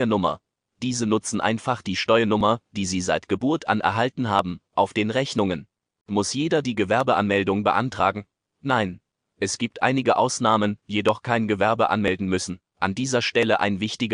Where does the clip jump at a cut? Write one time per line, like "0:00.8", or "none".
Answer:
0:10.8
0:12.7

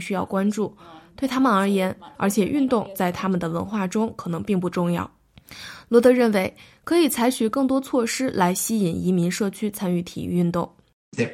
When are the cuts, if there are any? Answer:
0:02.2

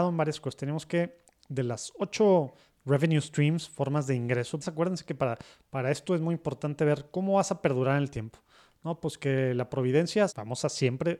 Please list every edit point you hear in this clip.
0:04.6
0:10.3

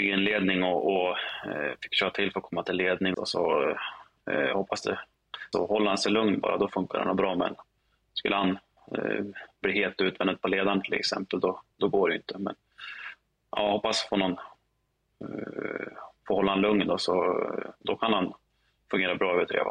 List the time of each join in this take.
0:03.1
0:05.5

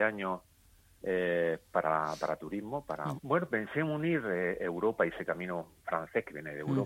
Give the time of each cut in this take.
0:03.2

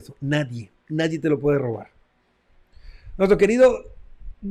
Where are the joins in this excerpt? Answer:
none

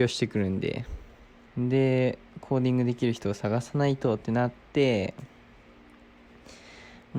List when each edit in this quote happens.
0:01.5

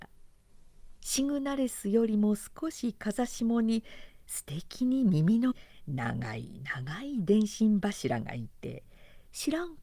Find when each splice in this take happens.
0:01.0
0:05.5

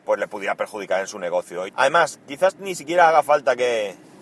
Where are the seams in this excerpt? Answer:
0:01.7

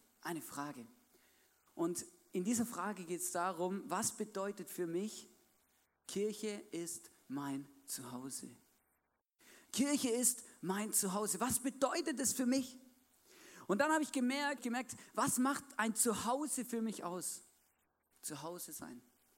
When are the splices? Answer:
0:14.6

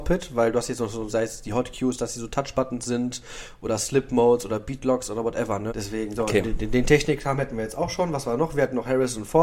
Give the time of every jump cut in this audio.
0:01.1
0:05.7

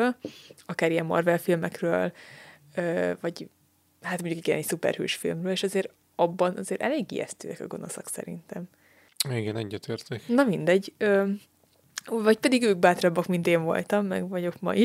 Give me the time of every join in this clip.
none

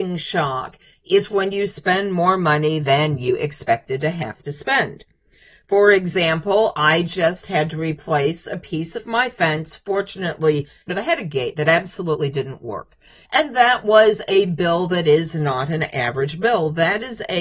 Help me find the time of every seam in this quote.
0:10.9
0:13.3

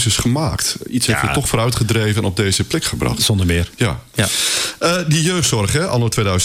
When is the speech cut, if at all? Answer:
none

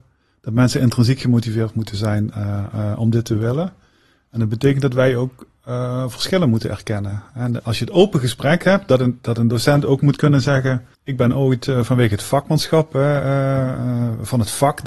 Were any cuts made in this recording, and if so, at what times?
0:07.6
0:10.9

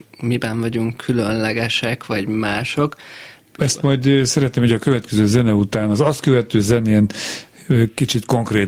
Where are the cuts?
0:03.6

